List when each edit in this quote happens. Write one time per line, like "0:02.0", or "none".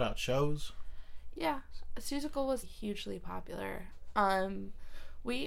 0:01.4
0:02.6